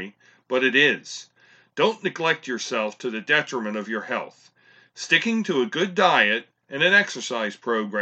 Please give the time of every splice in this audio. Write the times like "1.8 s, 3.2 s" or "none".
none